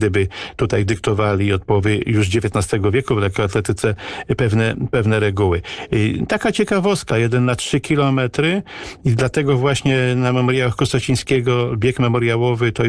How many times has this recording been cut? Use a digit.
1